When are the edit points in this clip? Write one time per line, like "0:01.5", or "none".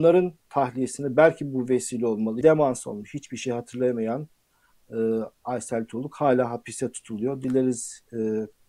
0:02.4